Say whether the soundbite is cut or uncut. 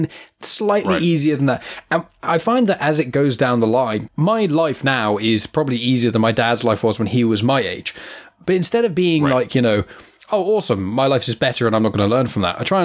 cut